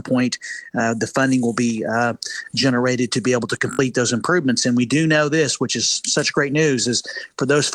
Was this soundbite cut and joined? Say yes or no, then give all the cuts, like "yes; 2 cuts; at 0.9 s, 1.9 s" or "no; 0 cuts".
no; 0 cuts